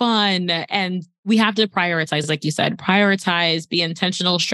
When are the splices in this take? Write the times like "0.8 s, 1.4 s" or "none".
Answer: none